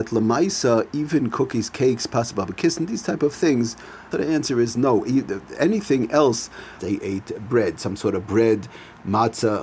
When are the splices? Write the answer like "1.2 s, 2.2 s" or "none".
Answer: 4.1 s, 6.8 s